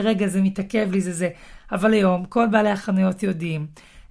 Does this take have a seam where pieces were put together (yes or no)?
no